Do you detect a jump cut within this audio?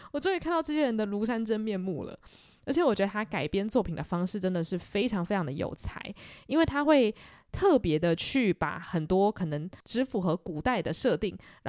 no; 0 cuts

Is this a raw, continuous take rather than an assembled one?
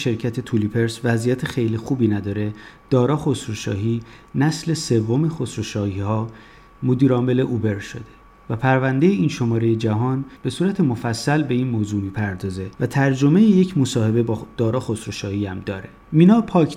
yes; 0 cuts

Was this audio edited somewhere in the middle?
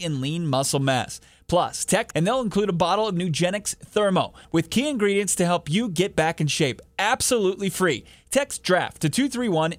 yes; 2 cuts; at 2.1 s, 4.4 s

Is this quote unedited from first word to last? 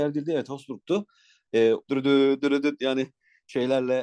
no; 1 cut; at 1.8 s

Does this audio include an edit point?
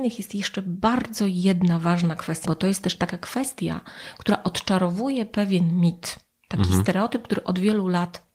yes; 1 cut; at 2.5 s

